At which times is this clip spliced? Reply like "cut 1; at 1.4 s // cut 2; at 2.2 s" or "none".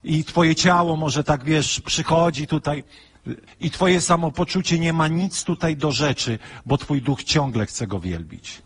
cut 1; at 3.5 s